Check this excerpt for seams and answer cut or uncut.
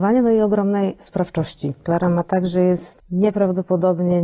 cut